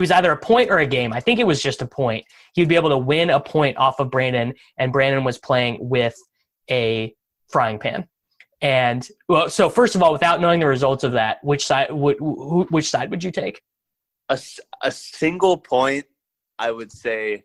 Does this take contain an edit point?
no; 0 cuts

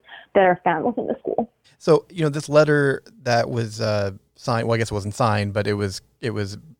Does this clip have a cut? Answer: yes; 1 cut; at 1.6 s

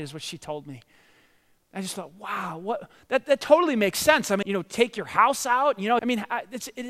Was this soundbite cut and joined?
yes; 2 cuts; at 4.4 s, 6.0 s

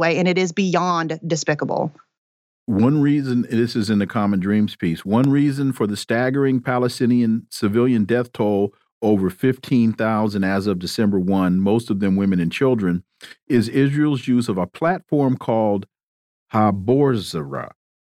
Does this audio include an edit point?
no; 0 cuts

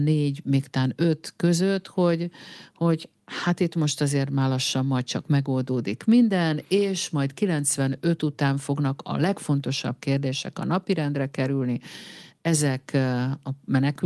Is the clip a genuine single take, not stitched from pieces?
yes; 0 cuts

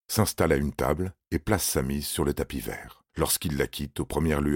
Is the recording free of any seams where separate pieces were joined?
no; 1 cut; at 3.1 s

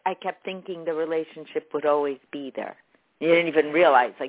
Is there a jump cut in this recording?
no; 0 cuts

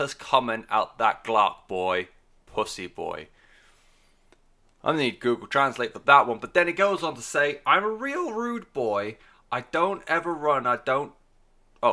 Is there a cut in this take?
no; 0 cuts

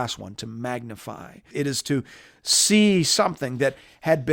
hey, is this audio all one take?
no; 1 cut; at 1.5 s

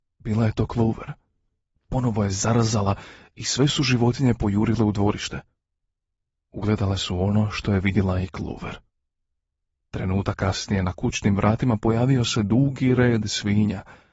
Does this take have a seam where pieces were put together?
yes; 1 cut; at 9.8 s

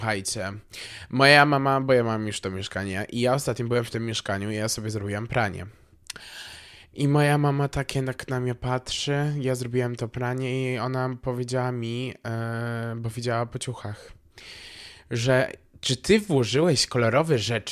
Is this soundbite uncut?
yes; 0 cuts

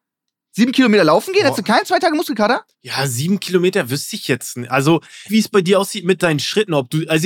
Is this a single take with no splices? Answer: no; 2 cuts; at 2.7 s, 5.3 s

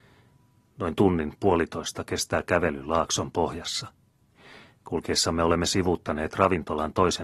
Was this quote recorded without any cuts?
yes; 0 cuts

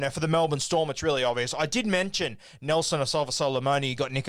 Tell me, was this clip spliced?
no; 0 cuts

